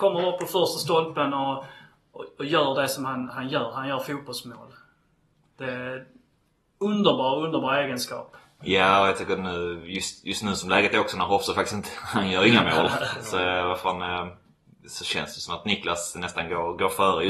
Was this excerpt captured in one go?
yes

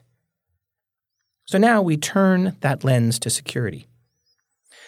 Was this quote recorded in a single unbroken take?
yes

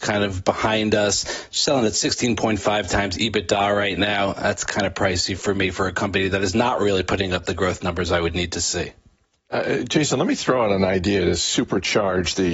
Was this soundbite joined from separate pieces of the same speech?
no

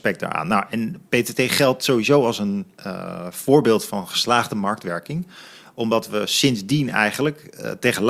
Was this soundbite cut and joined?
yes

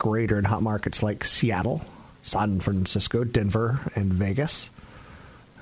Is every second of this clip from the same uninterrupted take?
yes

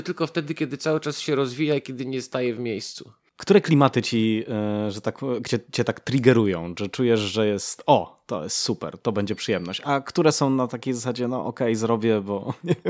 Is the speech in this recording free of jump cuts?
no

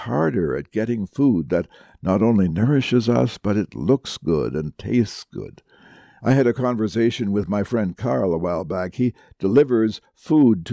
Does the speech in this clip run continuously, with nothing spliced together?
no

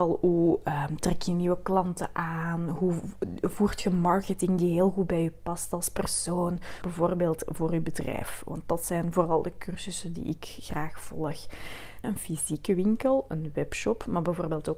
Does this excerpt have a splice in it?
yes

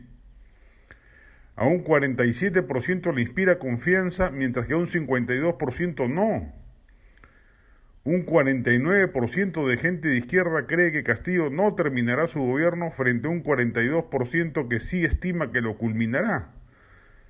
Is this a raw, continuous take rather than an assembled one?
yes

